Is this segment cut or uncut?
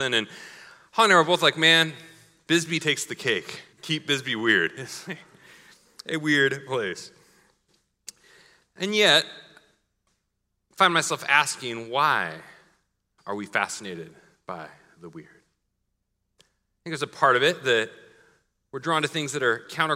cut